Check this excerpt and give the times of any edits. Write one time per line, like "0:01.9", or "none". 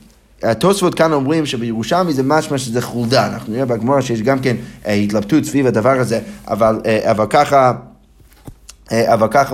none